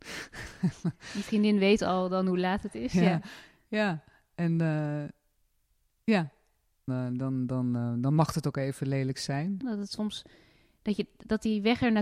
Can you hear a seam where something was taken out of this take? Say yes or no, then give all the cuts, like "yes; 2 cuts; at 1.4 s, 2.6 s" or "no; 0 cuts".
yes; 2 cuts; at 6.9 s, 9.6 s